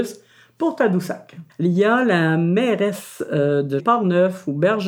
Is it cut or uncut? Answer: cut